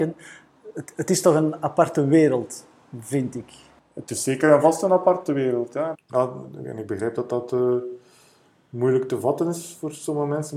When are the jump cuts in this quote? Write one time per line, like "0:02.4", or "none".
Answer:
0:05.9

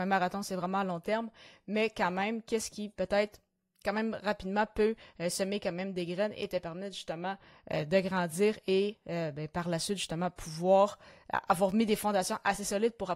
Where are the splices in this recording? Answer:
none

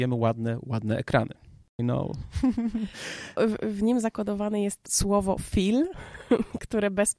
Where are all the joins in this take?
0:01.8

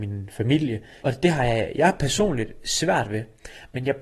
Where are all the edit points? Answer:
0:01.0

